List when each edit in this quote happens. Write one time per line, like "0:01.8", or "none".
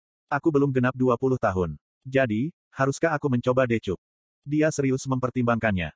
none